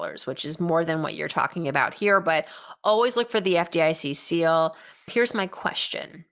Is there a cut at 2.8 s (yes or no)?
no